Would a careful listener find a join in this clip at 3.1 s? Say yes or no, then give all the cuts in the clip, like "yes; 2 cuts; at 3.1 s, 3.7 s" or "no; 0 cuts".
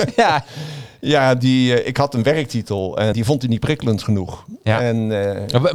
yes; 1 cut; at 3.1 s